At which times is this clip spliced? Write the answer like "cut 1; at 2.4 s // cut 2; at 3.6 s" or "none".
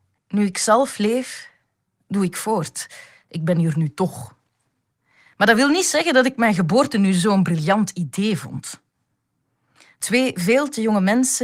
none